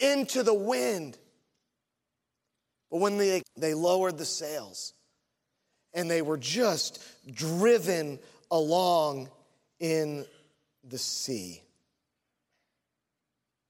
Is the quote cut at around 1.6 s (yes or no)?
no